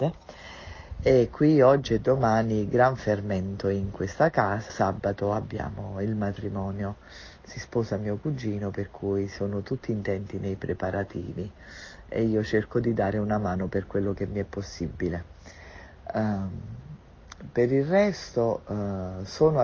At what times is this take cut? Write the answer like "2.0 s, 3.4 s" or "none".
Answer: 4.7 s